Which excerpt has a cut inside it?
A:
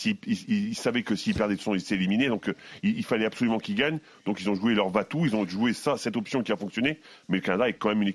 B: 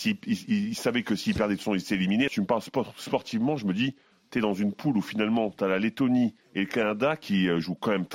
B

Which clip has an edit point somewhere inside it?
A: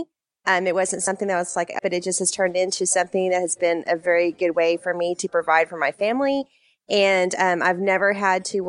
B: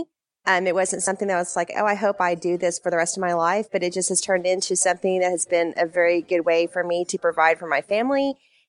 A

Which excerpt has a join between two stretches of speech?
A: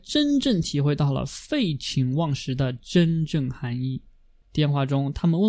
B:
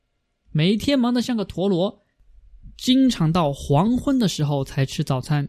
A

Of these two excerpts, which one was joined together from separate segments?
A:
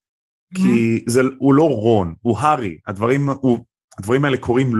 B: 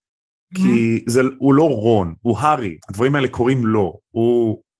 B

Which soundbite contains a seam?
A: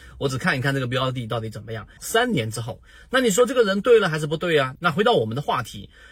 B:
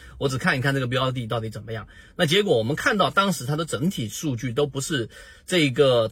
A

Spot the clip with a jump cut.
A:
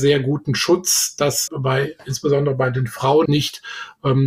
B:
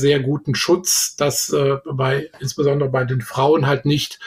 A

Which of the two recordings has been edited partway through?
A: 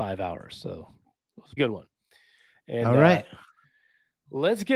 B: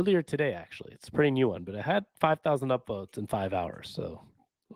A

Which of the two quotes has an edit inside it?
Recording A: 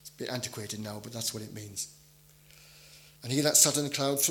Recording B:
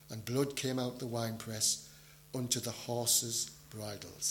A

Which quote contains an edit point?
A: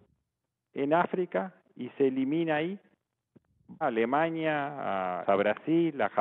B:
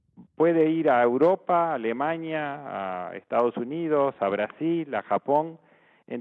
A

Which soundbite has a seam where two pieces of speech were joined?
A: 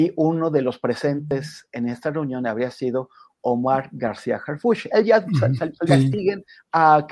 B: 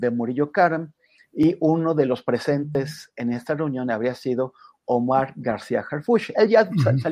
A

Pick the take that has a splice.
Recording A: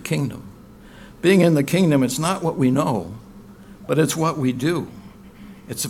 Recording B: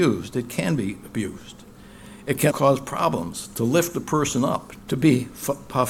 B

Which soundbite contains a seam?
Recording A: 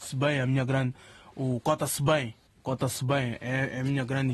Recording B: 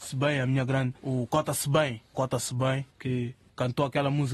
B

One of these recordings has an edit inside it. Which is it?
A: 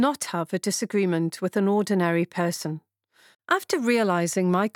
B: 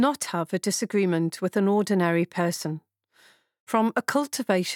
A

